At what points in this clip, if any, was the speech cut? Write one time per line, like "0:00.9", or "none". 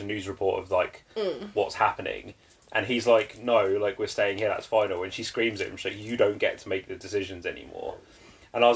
none